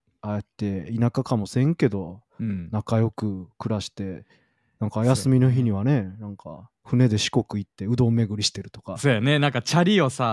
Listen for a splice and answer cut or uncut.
uncut